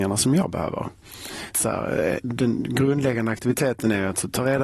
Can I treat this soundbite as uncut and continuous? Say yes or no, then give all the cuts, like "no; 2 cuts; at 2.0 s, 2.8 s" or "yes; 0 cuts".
no; 1 cut; at 1.5 s